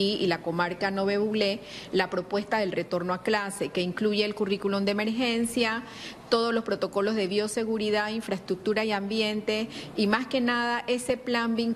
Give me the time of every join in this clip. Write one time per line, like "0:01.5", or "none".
none